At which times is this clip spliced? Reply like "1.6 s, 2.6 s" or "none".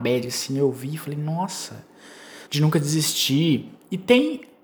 2.5 s